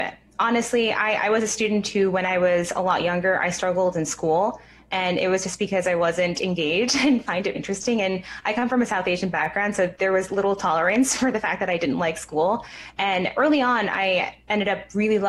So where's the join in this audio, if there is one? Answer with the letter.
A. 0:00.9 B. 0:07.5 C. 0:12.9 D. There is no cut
B